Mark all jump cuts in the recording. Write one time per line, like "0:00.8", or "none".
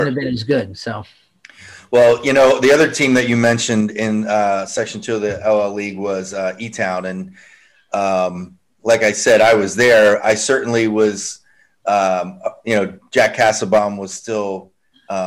none